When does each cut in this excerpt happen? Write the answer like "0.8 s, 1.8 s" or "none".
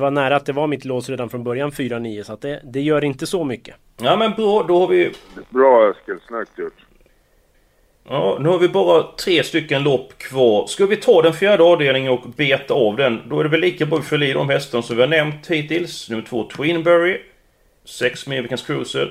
none